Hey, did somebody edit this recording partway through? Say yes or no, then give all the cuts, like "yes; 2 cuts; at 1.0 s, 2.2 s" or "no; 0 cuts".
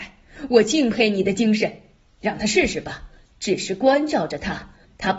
no; 0 cuts